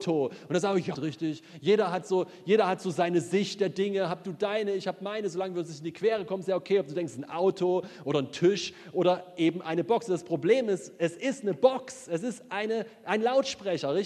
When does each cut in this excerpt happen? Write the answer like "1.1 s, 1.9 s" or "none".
0.9 s